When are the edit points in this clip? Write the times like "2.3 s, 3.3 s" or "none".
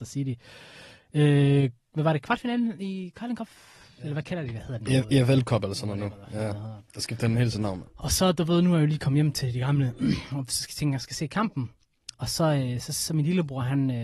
none

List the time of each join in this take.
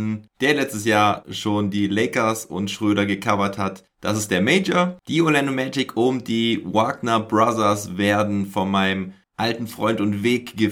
none

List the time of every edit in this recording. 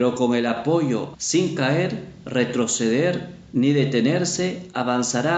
1.1 s

